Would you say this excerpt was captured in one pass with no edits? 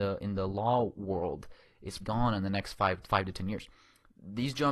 no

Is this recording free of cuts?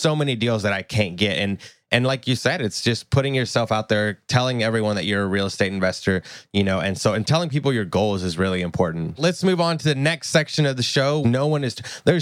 no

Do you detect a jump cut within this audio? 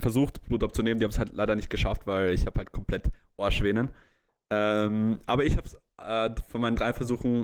no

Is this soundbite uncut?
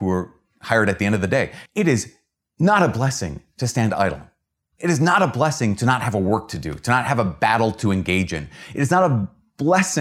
no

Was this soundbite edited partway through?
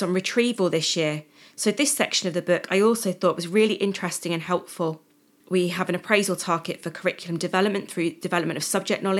yes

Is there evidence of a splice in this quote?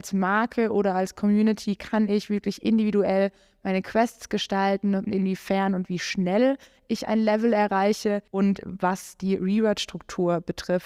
yes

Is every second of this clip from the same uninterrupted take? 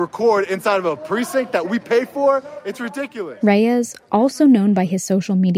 yes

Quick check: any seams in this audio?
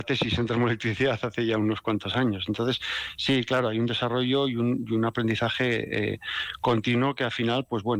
no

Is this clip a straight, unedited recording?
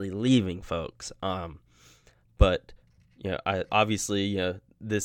no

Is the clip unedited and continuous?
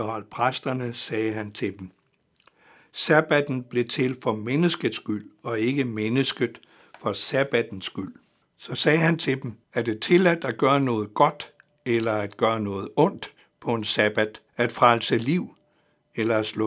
no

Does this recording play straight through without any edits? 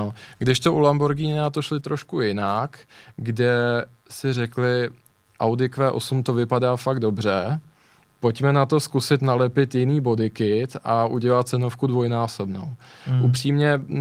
yes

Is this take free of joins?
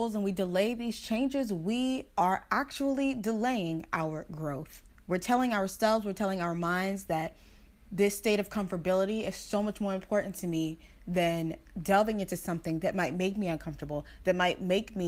yes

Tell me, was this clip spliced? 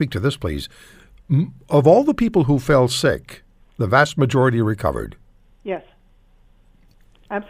no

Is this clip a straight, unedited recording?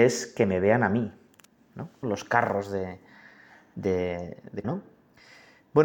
no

